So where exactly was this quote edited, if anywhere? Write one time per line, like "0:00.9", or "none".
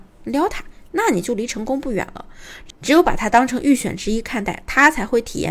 none